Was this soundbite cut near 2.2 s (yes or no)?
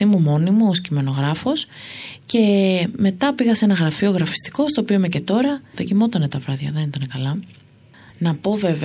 no